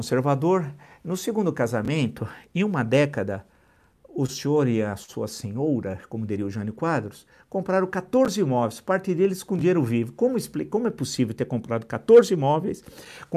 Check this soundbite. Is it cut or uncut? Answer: uncut